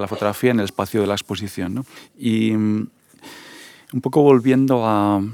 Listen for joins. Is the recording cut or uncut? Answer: uncut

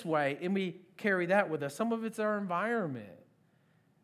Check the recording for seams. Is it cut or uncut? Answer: uncut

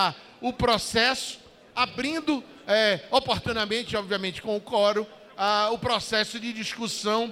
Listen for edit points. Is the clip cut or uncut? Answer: uncut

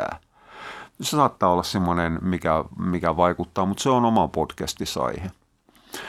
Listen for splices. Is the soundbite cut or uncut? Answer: uncut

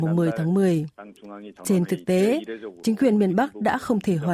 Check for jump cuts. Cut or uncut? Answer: uncut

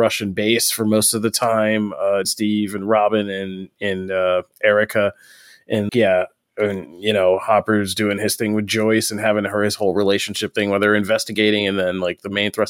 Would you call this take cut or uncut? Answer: cut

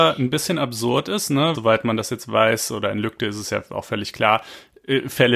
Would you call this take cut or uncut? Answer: cut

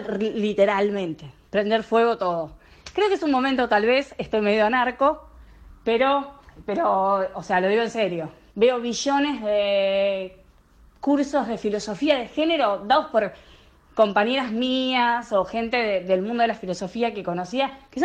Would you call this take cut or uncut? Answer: cut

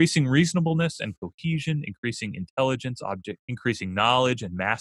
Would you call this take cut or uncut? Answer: cut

